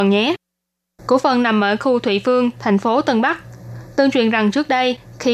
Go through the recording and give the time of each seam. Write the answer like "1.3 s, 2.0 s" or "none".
none